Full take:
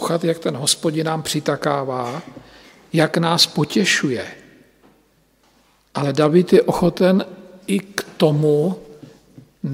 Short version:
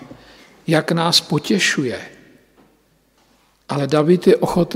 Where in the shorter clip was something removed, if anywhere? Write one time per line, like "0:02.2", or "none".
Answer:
none